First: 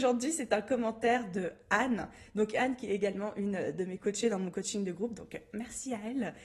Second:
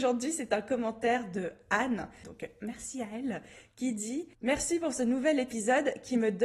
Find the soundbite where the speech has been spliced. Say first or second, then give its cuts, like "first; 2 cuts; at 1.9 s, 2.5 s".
second; 2 cuts; at 2.2 s, 4.3 s